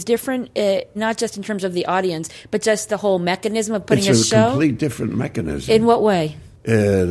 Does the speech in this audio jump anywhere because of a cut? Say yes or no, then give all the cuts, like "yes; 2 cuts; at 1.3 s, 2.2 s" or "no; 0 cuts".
yes; 1 cut; at 1.0 s